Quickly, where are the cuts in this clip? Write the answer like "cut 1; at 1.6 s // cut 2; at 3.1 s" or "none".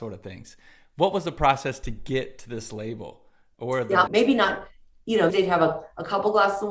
cut 1; at 4.1 s // cut 2; at 5.3 s